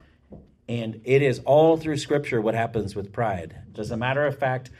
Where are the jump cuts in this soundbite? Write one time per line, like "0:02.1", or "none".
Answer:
0:03.7

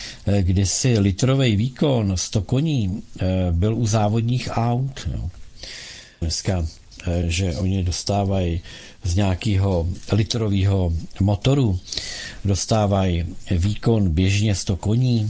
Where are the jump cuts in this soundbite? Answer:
0:06.2
0:07.2

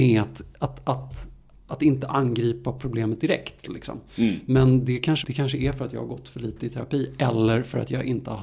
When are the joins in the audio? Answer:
0:05.2

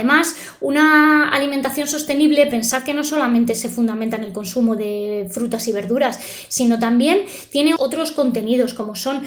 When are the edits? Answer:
0:07.8

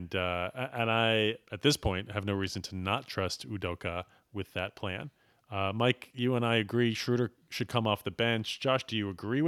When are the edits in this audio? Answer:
0:01.4
0:05.3

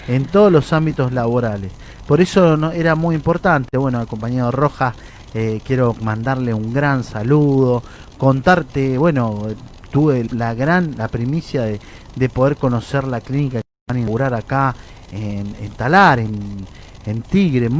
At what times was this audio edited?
0:10.3

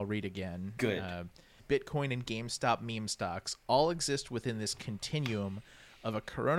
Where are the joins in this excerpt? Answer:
0:01.6

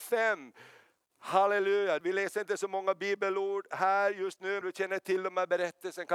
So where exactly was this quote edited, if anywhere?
0:02.0
0:04.6

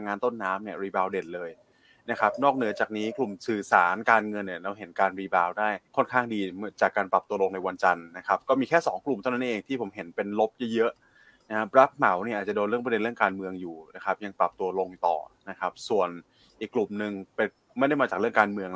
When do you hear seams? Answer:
0:05.9

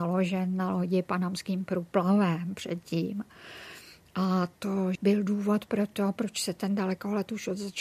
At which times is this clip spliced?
0:05.0

